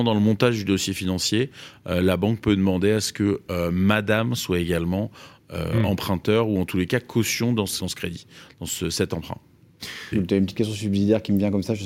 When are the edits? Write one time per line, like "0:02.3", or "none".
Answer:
0:07.8
0:10.1